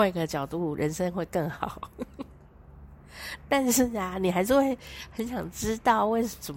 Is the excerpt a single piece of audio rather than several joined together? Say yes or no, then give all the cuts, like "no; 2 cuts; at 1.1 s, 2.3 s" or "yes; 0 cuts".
yes; 0 cuts